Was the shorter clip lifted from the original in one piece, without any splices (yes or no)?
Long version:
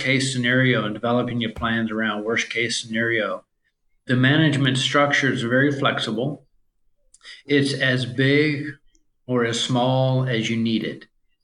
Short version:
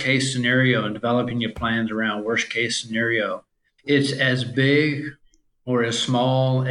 no